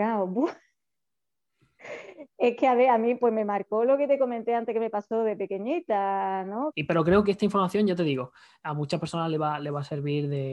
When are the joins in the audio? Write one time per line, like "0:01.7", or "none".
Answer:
0:06.7